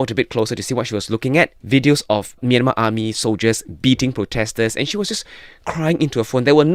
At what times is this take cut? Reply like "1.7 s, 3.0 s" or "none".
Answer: 1.6 s